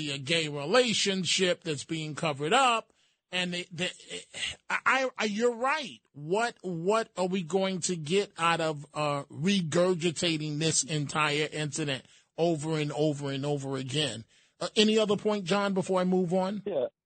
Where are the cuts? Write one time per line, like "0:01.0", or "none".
none